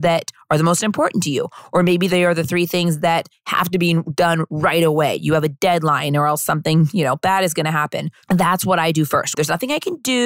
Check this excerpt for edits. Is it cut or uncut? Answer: cut